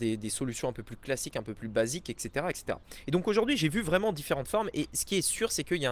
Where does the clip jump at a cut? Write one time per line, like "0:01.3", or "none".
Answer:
none